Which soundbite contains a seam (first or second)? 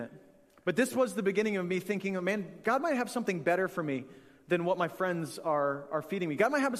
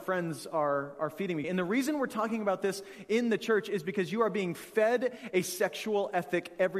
second